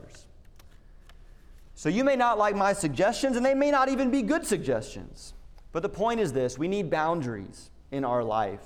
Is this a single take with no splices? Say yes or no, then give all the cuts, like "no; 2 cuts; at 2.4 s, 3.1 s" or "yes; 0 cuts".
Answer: yes; 0 cuts